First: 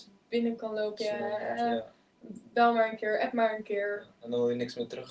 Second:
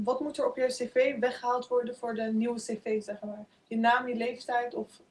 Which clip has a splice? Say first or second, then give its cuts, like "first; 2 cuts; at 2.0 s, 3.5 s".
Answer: first; 1 cut; at 1.0 s